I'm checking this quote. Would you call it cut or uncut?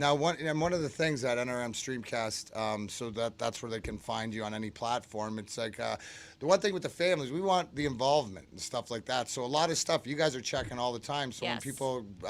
uncut